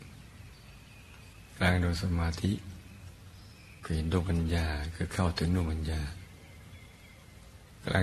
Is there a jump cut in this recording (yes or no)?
no